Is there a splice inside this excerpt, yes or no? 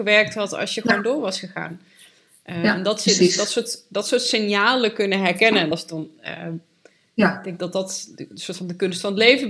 no